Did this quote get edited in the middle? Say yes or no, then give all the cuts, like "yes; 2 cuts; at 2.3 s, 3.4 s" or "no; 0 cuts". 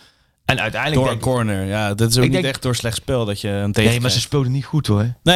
no; 0 cuts